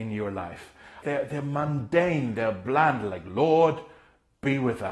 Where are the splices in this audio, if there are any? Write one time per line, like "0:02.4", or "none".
0:01.0